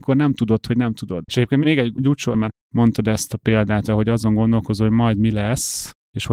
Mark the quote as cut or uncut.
cut